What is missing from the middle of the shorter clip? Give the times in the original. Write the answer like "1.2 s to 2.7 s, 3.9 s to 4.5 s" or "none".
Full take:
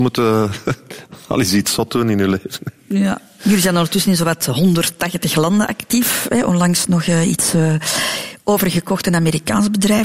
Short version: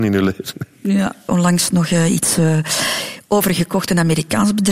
3.3 s to 6.4 s